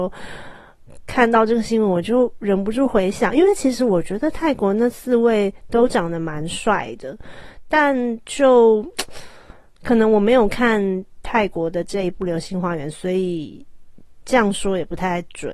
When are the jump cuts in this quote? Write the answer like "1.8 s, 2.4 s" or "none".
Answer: none